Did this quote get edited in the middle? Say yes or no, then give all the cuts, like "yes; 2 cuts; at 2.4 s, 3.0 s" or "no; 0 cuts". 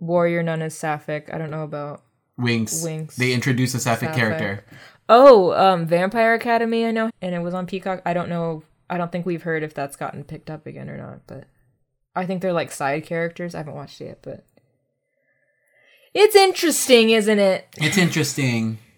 yes; 1 cut; at 7.1 s